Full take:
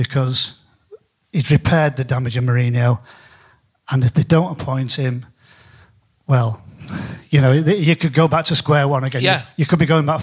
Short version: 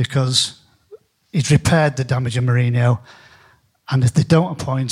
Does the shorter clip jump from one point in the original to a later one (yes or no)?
no